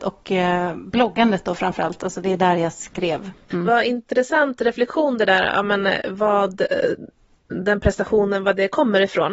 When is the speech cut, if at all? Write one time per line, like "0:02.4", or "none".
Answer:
0:03.5